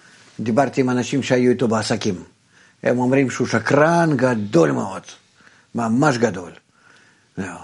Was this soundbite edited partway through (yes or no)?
no